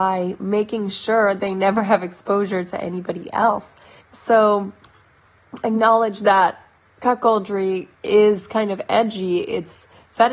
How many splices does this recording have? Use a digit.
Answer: 2